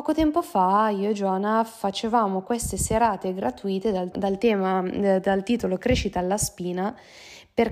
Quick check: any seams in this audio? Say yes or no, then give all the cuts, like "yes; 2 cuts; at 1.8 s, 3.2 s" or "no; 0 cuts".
yes; 1 cut; at 4.1 s